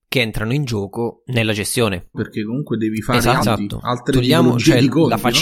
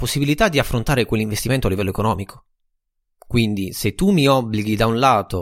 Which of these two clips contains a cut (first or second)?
first